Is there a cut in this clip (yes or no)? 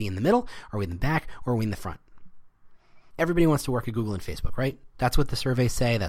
yes